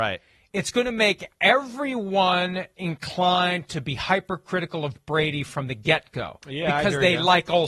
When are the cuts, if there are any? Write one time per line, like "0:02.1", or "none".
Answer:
none